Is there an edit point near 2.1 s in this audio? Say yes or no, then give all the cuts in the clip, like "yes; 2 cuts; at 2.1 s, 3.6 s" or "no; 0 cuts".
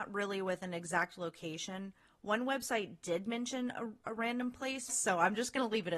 no; 1 cut; at 4.9 s